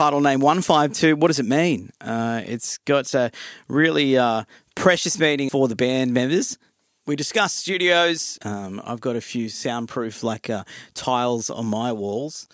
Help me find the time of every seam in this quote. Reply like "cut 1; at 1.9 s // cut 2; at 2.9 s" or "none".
cut 1; at 5.5 s // cut 2; at 8.4 s